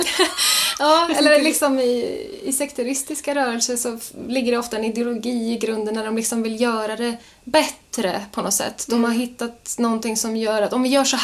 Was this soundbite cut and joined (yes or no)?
no